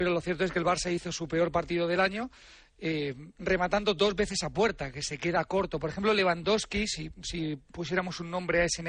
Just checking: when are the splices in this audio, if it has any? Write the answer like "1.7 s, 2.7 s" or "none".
none